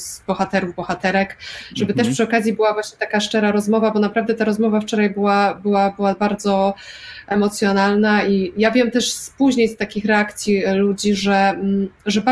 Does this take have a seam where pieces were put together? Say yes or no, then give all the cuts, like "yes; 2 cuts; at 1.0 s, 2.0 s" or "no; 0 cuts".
no; 0 cuts